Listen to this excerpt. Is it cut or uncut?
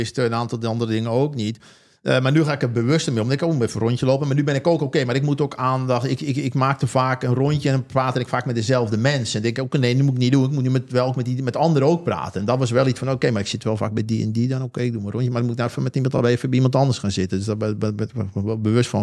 uncut